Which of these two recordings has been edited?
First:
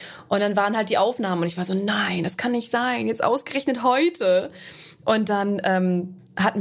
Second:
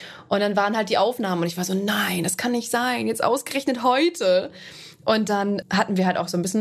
second; 1 cut; at 5.6 s

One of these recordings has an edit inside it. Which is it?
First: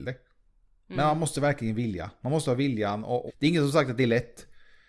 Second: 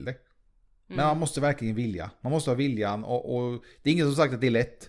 first; 1 cut; at 3.3 s

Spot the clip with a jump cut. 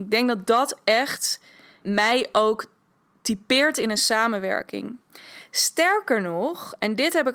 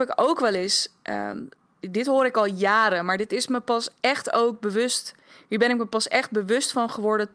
first; 1 cut; at 1.8 s

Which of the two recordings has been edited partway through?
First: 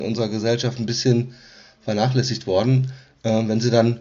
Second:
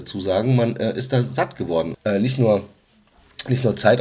second; 1 cut; at 1.9 s

